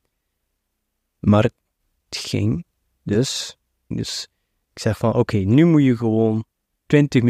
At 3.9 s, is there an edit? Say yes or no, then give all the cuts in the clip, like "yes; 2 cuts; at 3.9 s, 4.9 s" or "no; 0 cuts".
yes; 1 cut; at 3.9 s